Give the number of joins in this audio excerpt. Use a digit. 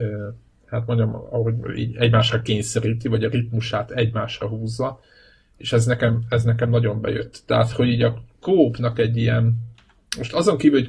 0